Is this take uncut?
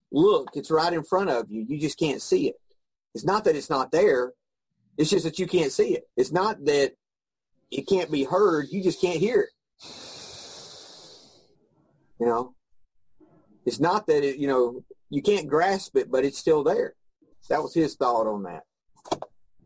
no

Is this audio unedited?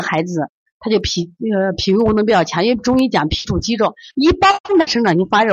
no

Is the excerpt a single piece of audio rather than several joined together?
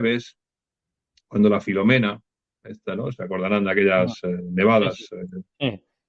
yes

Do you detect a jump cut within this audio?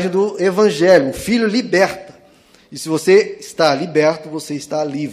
no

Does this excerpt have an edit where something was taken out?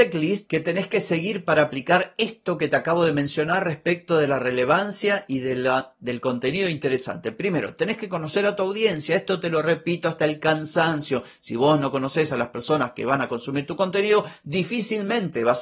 no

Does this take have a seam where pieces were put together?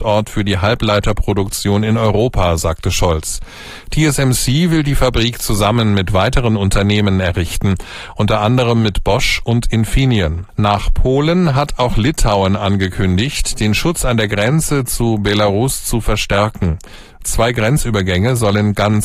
yes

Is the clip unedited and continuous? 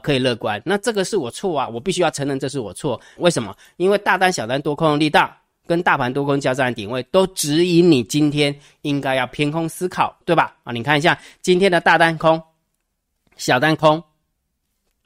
no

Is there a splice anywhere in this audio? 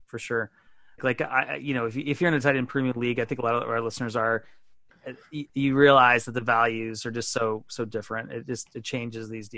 yes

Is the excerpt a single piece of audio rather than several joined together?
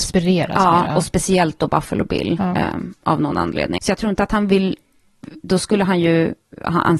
no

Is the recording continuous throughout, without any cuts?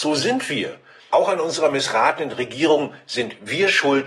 no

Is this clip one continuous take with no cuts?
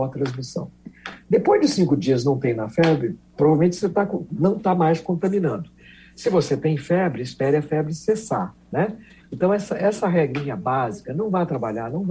yes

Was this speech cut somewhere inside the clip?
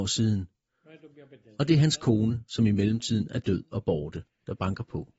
no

